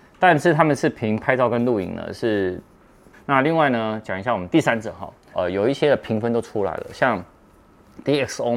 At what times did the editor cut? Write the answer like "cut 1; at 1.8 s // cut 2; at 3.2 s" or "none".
cut 1; at 3.1 s // cut 2; at 5.3 s